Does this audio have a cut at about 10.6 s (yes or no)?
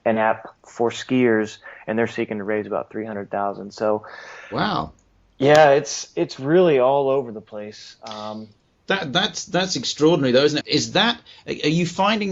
yes